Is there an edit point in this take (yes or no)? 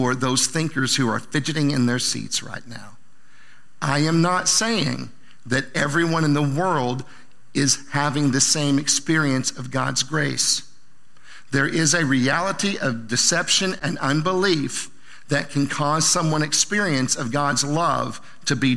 no